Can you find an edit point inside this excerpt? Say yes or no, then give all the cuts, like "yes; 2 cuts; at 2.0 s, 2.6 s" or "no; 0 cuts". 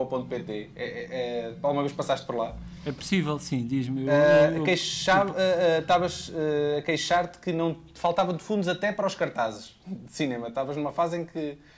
no; 0 cuts